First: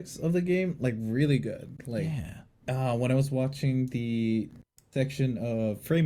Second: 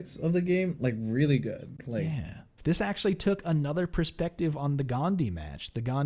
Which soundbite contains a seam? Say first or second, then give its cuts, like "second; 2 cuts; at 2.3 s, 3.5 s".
second; 1 cut; at 2.6 s